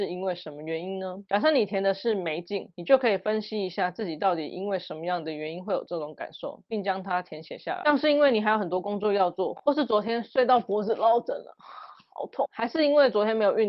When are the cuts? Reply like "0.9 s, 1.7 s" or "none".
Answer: none